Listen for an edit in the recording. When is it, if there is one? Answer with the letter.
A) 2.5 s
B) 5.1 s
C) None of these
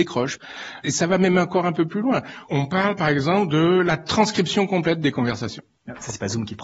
A